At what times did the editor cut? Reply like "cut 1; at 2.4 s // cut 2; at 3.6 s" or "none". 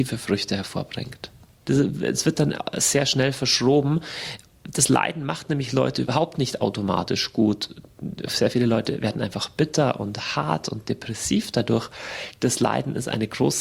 cut 1; at 1.6 s